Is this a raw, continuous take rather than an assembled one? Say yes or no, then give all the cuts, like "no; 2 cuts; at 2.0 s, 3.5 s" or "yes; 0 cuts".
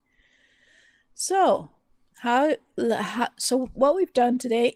yes; 0 cuts